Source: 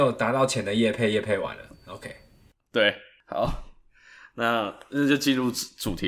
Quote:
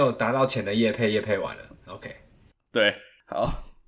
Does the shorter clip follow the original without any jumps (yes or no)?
yes